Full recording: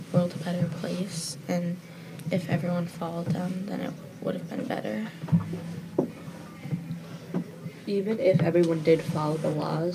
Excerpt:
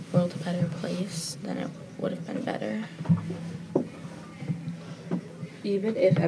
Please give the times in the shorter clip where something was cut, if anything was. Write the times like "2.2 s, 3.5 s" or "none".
1.4 s